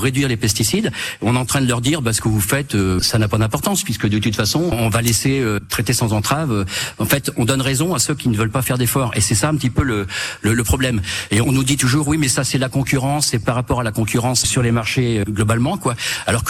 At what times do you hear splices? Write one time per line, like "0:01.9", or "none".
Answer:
none